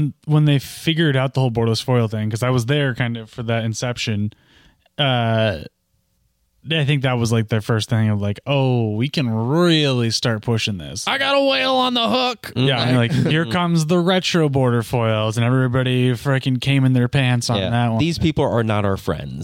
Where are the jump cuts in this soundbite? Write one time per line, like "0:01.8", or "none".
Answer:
none